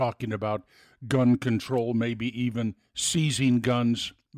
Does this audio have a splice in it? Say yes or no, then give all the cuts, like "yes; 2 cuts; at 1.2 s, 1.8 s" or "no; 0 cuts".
no; 0 cuts